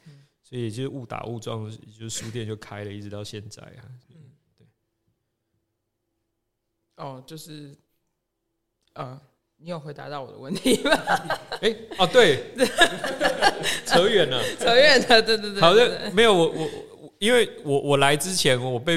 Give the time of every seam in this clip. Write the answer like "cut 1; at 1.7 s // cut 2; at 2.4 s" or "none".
none